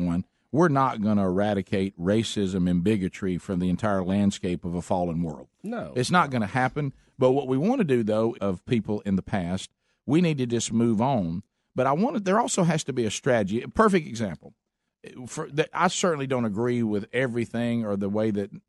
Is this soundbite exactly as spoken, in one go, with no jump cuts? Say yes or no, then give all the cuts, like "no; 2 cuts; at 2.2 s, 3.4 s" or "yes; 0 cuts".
no; 1 cut; at 8.3 s